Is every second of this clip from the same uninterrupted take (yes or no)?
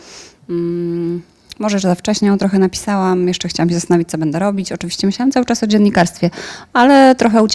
yes